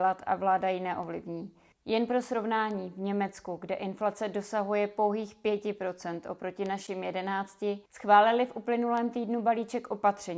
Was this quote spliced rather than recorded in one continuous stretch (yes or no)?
yes